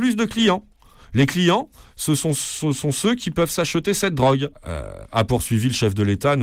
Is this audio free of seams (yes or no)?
no